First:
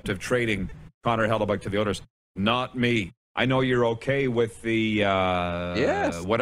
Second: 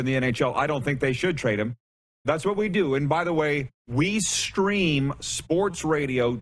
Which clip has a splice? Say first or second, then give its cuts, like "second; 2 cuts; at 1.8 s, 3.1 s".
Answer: second; 2 cuts; at 2.2 s, 3.8 s